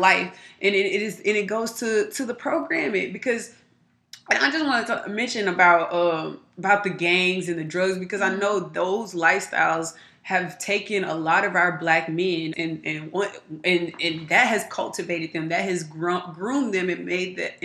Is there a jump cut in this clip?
yes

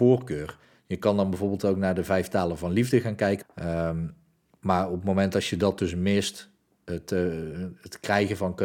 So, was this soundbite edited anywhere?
yes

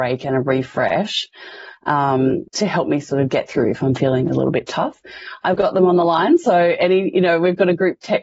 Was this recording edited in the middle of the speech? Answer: yes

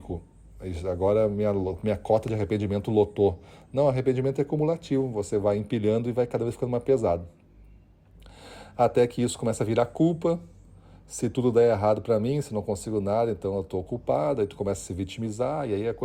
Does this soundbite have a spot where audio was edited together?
no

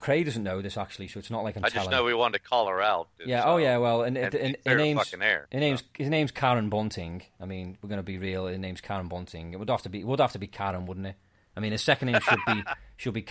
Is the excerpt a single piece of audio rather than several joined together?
yes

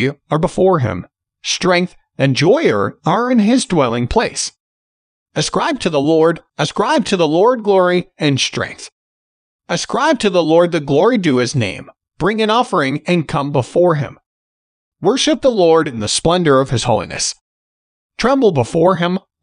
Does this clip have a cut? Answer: yes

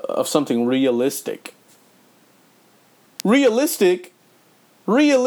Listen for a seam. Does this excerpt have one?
yes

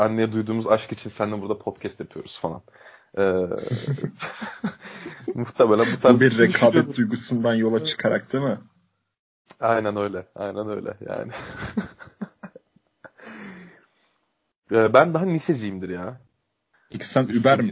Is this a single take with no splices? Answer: no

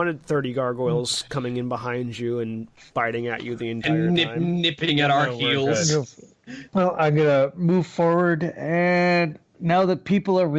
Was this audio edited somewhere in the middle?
yes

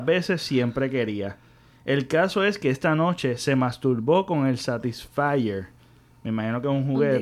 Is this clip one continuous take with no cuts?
yes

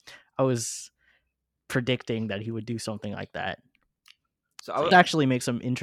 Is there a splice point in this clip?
yes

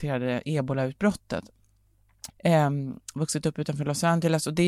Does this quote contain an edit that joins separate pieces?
yes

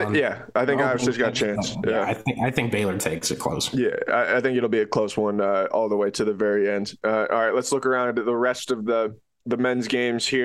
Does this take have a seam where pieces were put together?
no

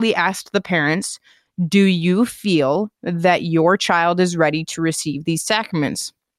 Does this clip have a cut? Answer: no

